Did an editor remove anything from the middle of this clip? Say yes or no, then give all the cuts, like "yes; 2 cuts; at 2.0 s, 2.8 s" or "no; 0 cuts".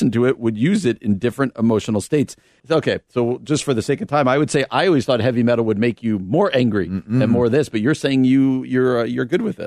yes; 1 cut; at 2.6 s